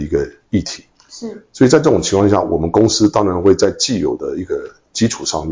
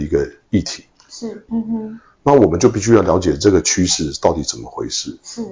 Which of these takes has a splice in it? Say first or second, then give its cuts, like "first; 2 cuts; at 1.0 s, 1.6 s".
second; 1 cut; at 1.5 s